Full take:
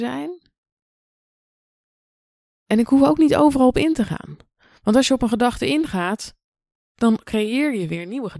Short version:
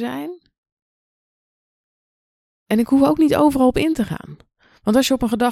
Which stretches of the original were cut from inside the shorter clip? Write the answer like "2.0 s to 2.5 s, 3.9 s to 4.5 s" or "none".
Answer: none